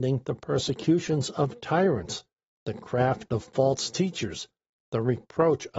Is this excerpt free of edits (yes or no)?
yes